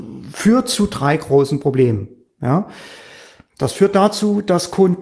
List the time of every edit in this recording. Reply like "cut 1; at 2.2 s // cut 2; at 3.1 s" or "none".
none